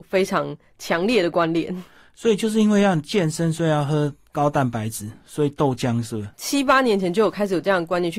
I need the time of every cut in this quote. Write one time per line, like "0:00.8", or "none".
0:06.3